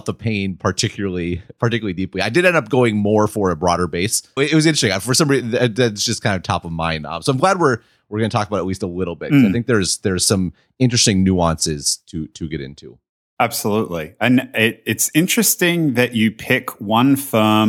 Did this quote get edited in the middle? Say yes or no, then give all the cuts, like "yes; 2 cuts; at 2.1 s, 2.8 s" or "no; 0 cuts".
yes; 1 cut; at 4.4 s